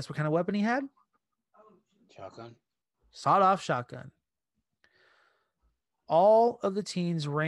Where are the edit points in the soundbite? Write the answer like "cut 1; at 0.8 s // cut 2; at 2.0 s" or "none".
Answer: none